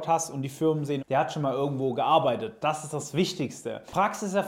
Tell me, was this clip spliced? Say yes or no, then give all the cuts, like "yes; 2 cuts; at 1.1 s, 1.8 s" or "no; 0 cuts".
yes; 1 cut; at 1.0 s